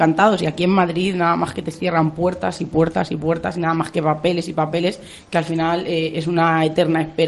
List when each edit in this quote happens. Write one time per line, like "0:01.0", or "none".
none